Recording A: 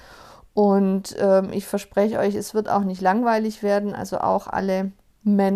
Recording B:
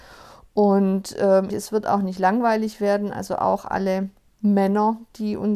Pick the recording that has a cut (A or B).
B